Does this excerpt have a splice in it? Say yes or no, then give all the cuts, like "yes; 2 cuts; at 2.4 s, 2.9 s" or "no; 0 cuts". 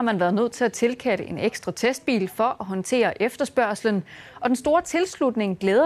no; 0 cuts